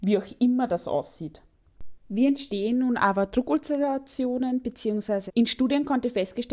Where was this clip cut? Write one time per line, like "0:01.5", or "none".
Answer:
0:05.3